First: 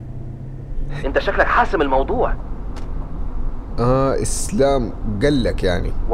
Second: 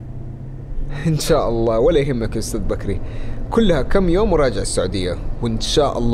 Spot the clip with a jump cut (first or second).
first